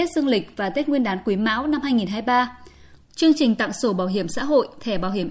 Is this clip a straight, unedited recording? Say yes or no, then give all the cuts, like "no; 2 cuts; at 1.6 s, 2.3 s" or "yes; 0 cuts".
no; 1 cut; at 3.0 s